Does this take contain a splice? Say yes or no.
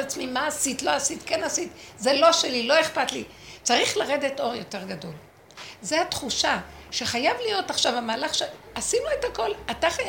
no